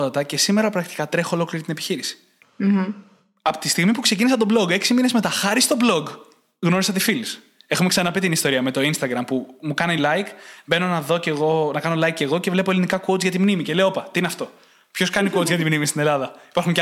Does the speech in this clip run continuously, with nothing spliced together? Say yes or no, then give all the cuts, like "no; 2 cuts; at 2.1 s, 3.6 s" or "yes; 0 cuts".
yes; 0 cuts